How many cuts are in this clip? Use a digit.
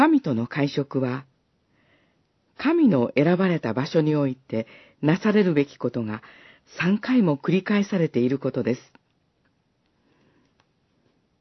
0